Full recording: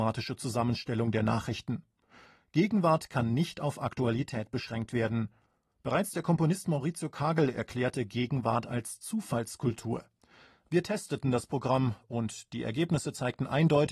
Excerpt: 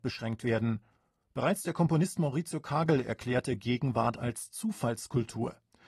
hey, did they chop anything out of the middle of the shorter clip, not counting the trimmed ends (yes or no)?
no